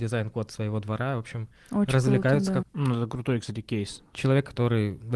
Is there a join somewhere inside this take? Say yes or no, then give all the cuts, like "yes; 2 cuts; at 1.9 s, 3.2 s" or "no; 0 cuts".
yes; 2 cuts; at 2.6 s, 4.1 s